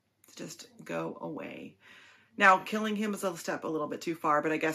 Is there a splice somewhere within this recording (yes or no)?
no